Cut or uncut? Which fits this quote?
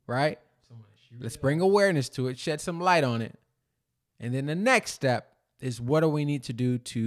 uncut